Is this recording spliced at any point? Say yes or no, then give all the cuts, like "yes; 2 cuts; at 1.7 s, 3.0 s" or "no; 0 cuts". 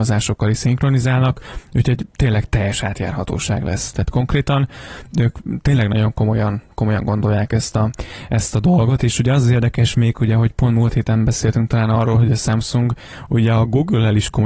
no; 0 cuts